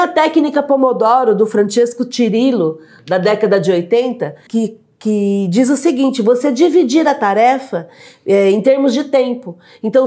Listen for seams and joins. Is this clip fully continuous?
no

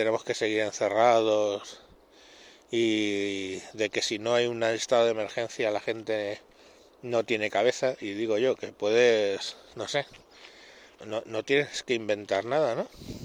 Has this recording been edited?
yes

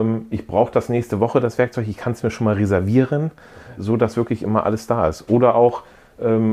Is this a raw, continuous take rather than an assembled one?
no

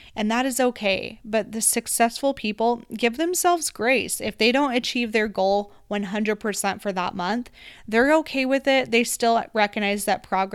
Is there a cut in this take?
no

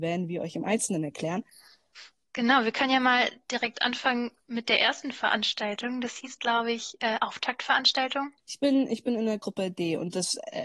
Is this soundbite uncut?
no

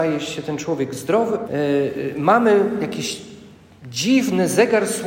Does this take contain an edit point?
yes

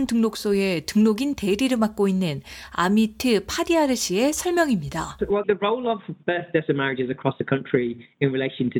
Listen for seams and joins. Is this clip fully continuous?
no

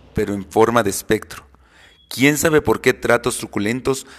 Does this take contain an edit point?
no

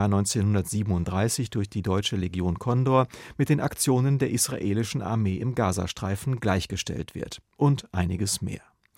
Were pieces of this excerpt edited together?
no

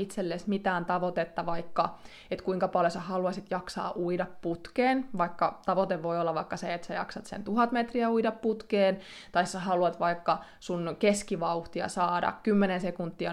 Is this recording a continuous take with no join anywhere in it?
yes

